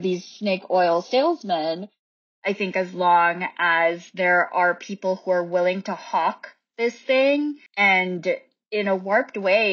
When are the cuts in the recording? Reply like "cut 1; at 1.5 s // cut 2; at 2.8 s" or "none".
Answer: cut 1; at 2.3 s // cut 2; at 7.7 s